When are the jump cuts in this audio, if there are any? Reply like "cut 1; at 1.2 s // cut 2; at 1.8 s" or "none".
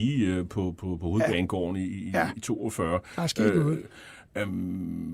none